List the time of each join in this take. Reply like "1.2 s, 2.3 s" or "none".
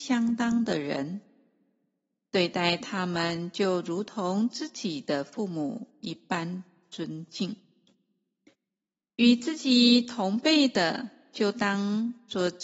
none